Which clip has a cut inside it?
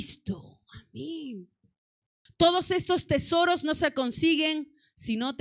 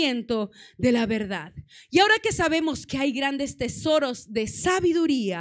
first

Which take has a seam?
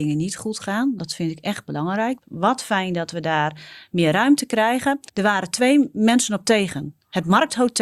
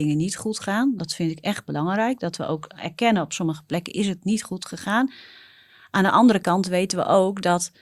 first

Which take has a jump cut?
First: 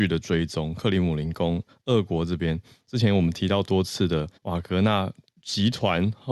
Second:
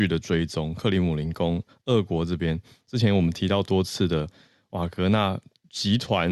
first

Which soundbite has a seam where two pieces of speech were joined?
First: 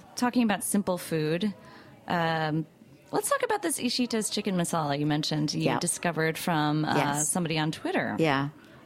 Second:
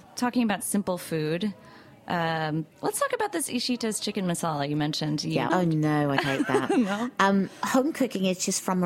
second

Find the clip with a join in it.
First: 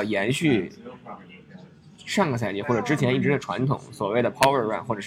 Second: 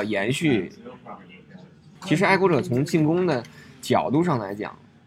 second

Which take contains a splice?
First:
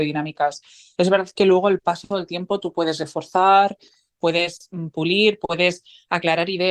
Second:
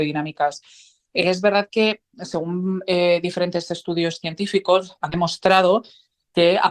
first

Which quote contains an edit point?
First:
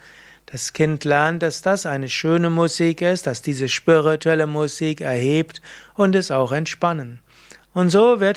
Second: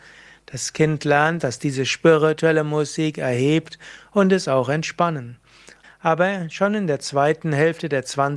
second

